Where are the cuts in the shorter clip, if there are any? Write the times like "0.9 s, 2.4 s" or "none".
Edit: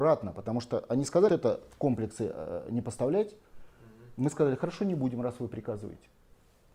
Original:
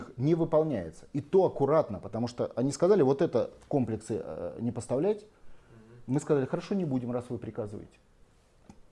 1.3 s